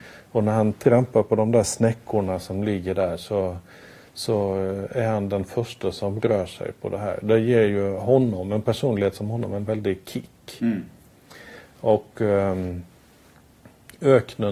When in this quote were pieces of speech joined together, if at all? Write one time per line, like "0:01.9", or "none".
none